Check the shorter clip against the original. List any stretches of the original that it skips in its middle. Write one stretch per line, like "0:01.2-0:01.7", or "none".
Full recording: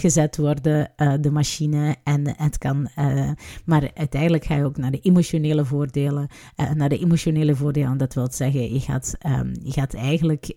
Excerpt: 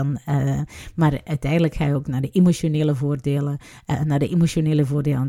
none